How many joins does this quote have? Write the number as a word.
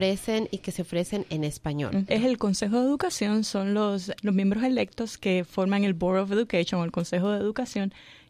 two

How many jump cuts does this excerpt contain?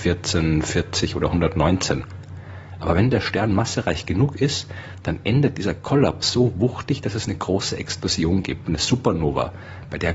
zero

